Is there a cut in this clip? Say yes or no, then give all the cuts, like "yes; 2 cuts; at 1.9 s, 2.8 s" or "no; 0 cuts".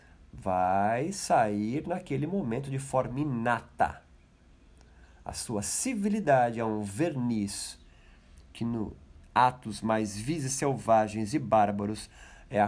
no; 0 cuts